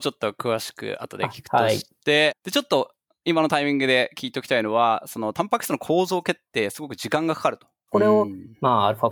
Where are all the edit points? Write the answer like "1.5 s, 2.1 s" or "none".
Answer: 2.3 s, 7.9 s

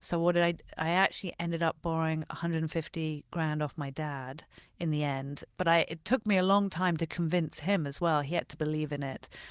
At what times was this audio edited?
8.5 s

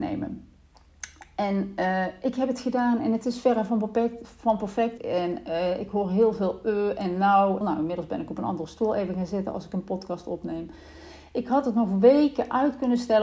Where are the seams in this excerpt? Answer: 5.0 s, 7.6 s

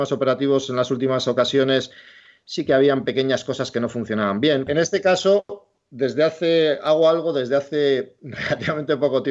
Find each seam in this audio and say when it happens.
4.7 s

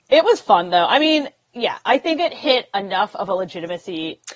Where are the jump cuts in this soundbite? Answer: none

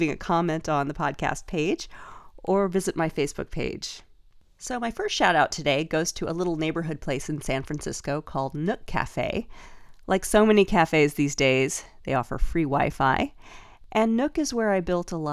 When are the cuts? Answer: none

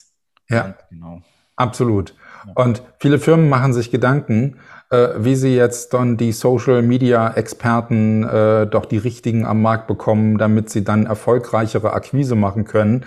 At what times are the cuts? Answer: none

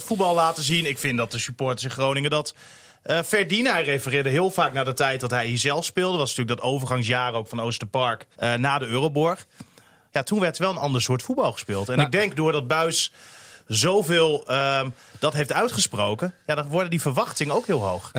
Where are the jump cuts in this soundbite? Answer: 8.3 s

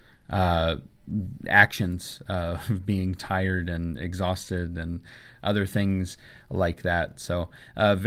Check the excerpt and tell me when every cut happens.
none

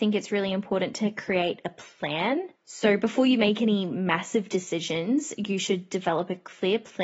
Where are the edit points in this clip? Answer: 2.5 s

